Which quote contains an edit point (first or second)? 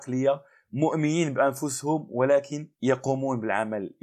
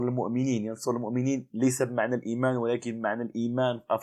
first